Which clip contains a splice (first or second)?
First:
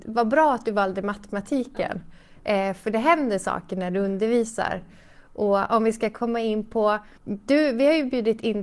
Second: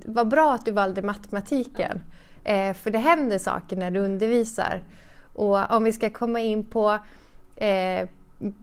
first